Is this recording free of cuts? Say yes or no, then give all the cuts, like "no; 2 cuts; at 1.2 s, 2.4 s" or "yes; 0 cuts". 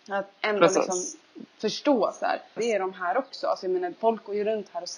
no; 2 cuts; at 2.6 s, 3.9 s